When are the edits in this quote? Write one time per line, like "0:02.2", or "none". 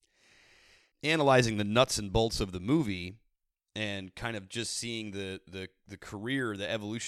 none